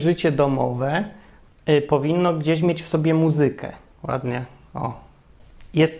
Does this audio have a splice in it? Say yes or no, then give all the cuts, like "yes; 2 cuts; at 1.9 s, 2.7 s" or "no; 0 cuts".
yes; 1 cut; at 4.0 s